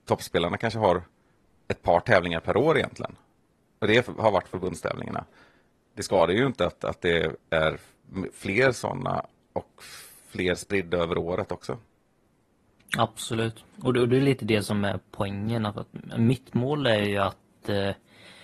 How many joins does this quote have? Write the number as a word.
zero